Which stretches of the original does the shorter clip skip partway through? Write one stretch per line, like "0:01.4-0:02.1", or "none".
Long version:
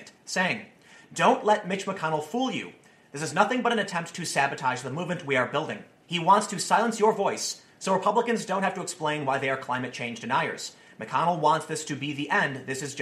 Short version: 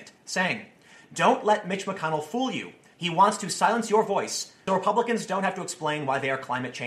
0:02.9-0:06.0
0:07.8-0:07.9